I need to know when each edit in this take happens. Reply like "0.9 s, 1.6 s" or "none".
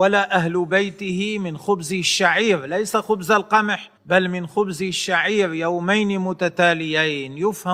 4.0 s